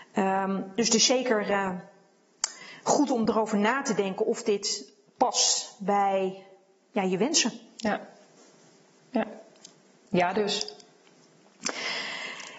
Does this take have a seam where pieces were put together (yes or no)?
no